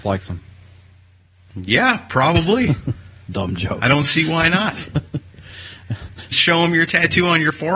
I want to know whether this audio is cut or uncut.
cut